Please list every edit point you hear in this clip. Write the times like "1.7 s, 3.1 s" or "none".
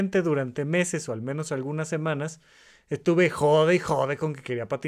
none